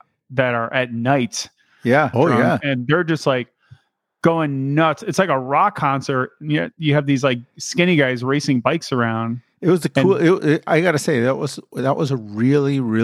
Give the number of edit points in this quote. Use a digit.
1